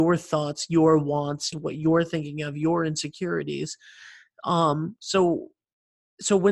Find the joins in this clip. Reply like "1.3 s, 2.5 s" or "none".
1.5 s